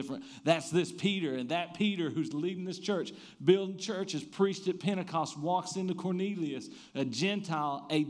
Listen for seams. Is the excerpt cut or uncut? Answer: uncut